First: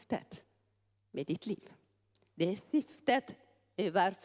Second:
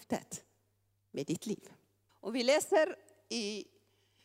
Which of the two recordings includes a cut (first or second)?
second